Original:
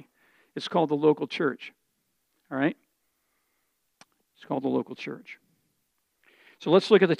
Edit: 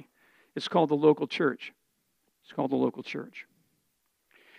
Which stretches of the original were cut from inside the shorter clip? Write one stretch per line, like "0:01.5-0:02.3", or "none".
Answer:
0:02.2-0:04.2